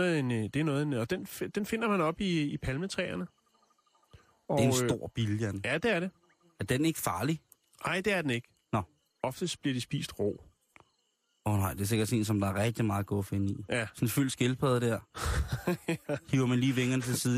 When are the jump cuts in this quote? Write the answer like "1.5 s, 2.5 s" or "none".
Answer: none